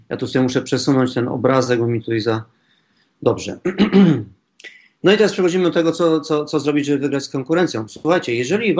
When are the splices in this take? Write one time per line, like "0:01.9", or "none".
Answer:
none